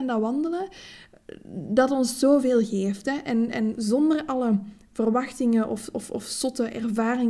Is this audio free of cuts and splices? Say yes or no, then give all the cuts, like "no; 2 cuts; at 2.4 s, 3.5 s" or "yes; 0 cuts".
yes; 0 cuts